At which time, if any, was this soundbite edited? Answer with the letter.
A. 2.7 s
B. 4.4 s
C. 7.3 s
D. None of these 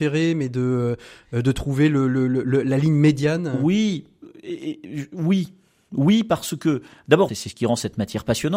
C